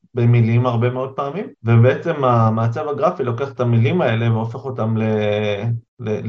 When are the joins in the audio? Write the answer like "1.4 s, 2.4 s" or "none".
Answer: 1.5 s